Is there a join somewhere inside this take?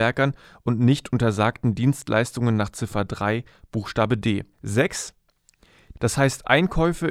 yes; 2 cuts; at 4.5 s, 5.9 s

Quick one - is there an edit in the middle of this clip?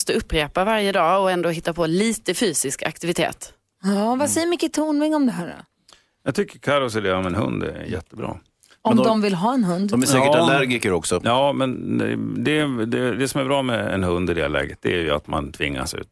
no; 0 cuts

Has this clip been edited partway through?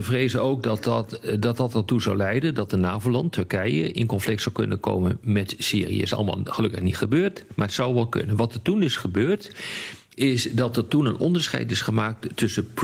no; 0 cuts

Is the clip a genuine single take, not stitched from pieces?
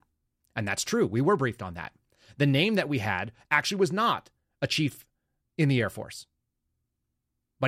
yes; 0 cuts

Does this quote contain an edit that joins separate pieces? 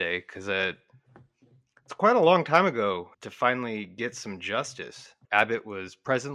yes; 2 cuts; at 3.1 s, 5.2 s

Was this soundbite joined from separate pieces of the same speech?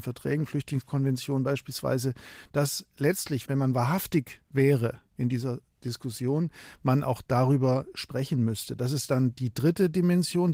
no; 0 cuts

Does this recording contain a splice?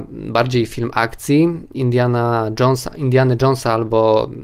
yes; 1 cut; at 1.7 s

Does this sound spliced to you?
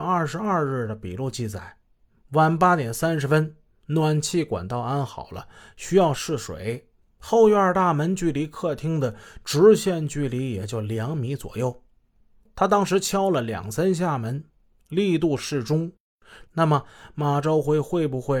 yes; 2 cuts; at 7.0 s, 16.5 s

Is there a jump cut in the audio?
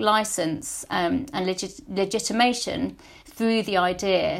no; 0 cuts

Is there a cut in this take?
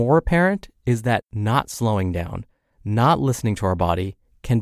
no; 0 cuts

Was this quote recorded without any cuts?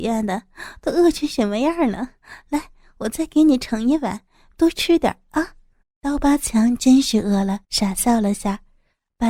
no; 2 cuts; at 5.8 s, 7.6 s

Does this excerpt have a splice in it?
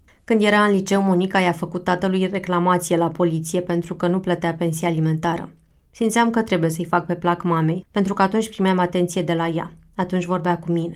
yes; 1 cut; at 7.8 s

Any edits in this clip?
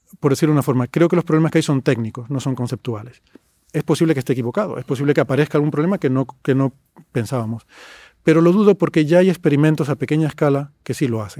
no; 0 cuts

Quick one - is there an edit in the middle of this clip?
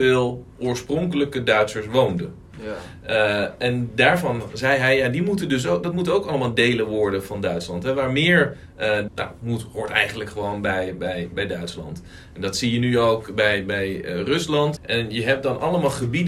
yes; 2 cuts; at 9.1 s, 14.8 s

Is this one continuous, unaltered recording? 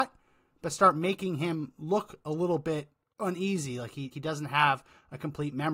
no; 1 cut; at 4.1 s

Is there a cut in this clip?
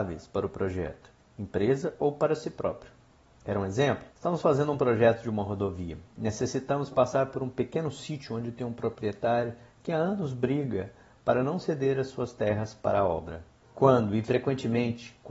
yes; 2 cuts; at 4.1 s, 13.6 s

